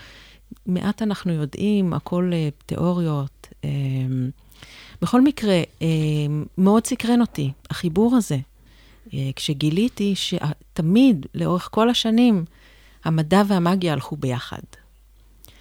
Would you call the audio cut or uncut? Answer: uncut